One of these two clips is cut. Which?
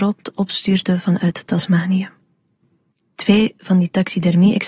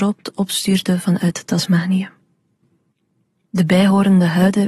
first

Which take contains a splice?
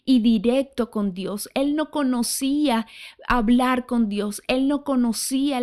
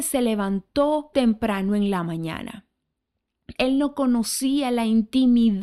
second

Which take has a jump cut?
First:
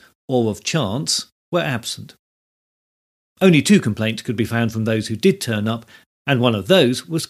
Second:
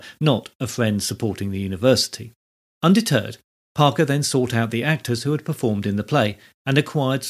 second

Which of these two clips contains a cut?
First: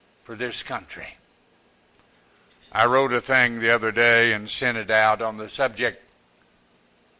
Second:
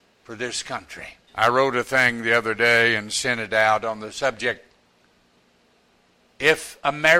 second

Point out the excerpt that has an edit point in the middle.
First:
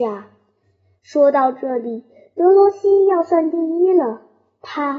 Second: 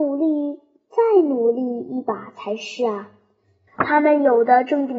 second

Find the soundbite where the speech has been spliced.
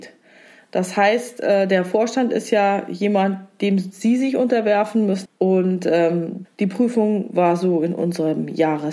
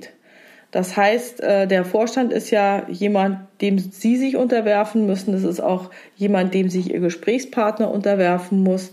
first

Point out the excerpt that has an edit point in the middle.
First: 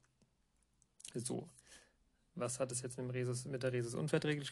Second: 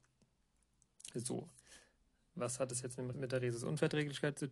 second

